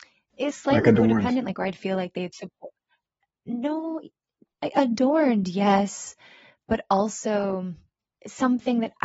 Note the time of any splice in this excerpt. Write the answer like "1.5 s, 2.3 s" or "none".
none